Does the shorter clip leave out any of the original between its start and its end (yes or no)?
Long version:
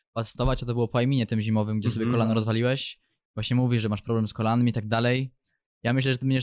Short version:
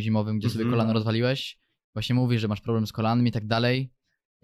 no